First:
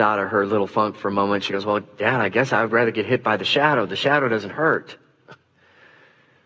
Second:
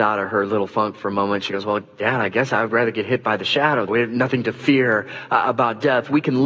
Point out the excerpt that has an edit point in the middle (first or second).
second